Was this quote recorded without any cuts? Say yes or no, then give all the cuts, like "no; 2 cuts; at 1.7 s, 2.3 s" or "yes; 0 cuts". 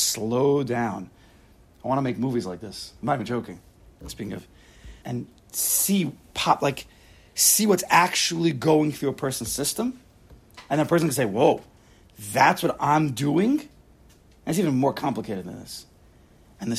no; 1 cut; at 5.0 s